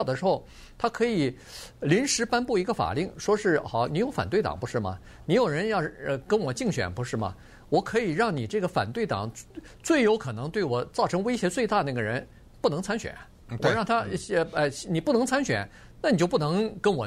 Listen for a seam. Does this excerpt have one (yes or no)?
no